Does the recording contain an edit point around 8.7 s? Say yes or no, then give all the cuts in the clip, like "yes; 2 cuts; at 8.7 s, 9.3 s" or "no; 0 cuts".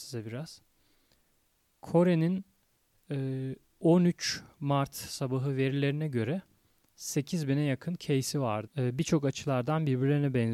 yes; 1 cut; at 8.7 s